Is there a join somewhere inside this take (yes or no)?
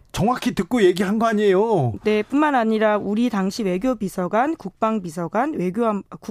yes